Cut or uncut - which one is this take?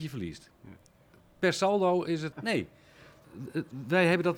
cut